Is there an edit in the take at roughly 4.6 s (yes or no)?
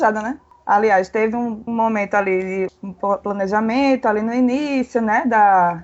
no